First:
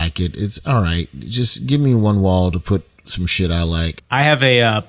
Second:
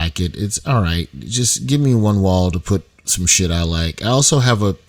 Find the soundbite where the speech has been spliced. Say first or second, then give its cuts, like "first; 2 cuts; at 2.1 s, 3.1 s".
first; 1 cut; at 4.0 s